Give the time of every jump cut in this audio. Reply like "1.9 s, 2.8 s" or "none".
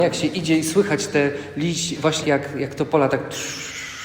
2.2 s